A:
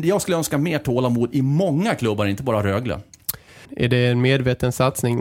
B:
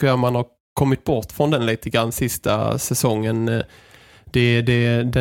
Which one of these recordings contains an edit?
A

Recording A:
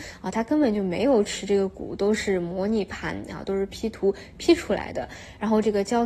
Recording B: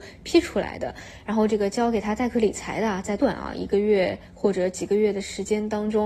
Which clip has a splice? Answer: B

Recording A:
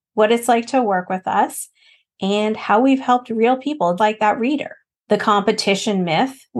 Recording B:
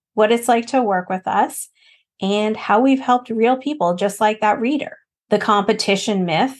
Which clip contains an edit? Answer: A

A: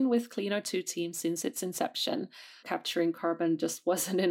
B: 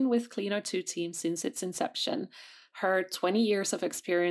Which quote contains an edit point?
A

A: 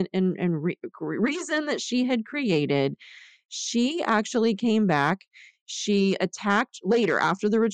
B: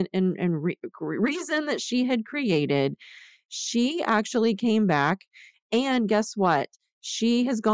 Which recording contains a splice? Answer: B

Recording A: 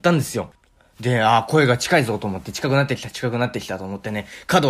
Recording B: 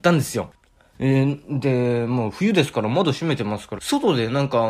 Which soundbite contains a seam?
B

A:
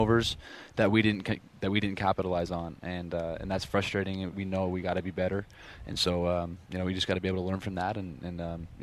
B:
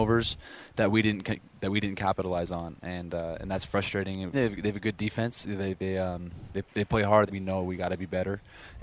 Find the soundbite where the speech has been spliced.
B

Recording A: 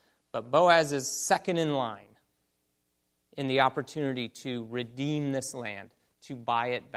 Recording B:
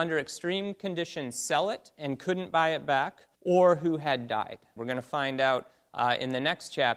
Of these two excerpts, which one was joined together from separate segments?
B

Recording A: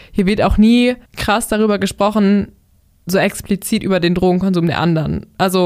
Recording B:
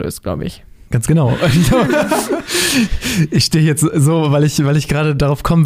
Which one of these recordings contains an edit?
A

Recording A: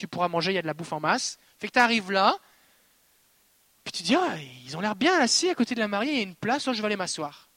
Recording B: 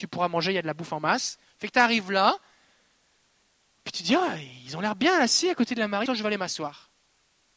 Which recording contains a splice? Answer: B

